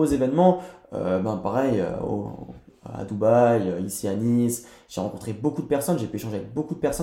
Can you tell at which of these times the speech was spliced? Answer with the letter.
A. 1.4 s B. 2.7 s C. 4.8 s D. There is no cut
D